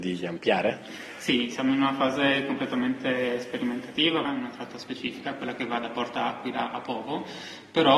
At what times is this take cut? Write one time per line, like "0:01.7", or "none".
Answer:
0:04.2